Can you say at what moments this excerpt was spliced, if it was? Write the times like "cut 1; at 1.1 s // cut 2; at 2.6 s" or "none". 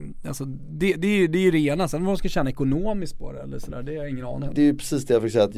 cut 1; at 4.5 s